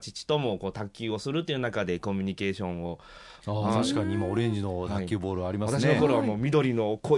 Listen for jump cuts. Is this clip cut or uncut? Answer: cut